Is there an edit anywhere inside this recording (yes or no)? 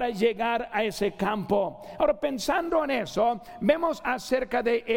no